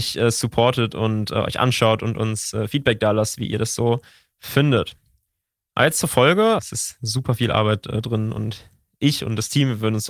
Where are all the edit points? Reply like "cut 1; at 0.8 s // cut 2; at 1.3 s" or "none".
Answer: cut 1; at 6.6 s